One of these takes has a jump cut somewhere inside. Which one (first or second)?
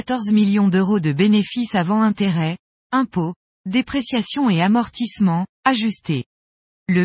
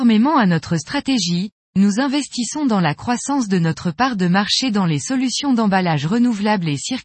first